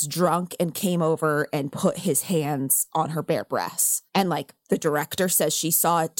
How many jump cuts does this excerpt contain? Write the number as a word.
one